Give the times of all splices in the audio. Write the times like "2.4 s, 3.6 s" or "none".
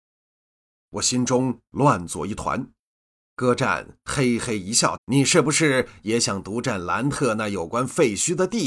3.3 s, 5.0 s